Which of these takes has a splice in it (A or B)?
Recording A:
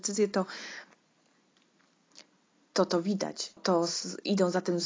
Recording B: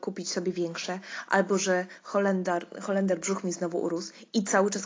A